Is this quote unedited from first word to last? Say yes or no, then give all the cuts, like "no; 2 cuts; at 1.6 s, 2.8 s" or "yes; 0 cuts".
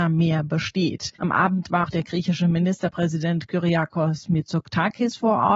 no; 1 cut; at 1.1 s